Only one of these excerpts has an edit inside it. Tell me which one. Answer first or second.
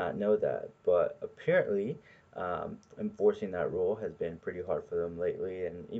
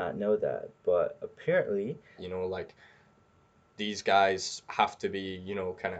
second